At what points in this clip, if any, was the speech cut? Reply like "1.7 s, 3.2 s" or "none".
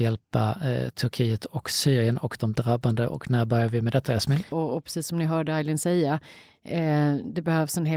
4.5 s